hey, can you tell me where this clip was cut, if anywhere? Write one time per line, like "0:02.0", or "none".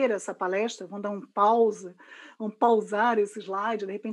none